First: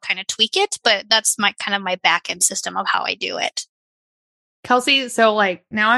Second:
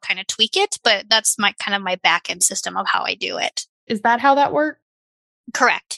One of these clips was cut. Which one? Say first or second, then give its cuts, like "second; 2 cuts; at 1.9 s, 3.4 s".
second; 1 cut; at 3.9 s